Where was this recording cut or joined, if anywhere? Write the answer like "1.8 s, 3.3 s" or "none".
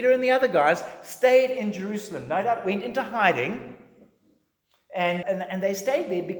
5.2 s